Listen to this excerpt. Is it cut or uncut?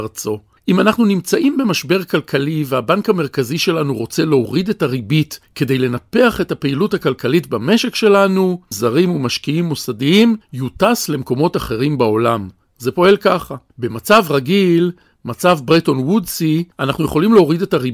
cut